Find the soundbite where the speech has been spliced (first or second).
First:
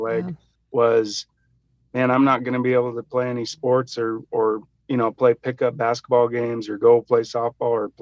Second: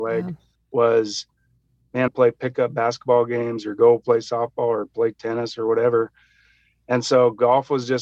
second